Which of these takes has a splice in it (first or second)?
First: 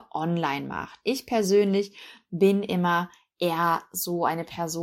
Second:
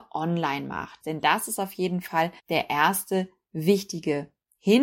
second